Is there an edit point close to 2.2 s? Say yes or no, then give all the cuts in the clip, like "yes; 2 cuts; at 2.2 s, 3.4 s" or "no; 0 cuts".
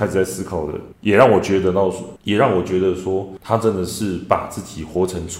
no; 0 cuts